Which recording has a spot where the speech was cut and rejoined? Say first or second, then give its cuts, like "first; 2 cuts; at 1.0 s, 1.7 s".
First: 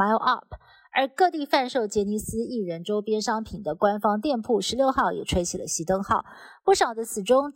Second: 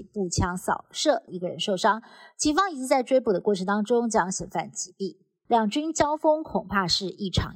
second; 2 cuts; at 1.3 s, 5.5 s